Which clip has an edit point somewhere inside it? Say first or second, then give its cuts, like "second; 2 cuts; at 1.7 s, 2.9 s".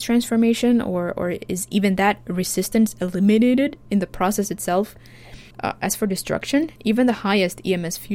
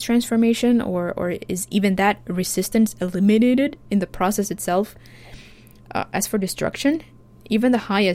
first; 2 cuts; at 5.5 s, 6.8 s